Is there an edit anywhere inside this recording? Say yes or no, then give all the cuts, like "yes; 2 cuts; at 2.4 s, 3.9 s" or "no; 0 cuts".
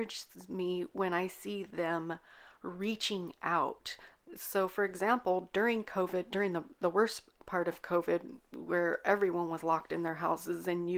no; 0 cuts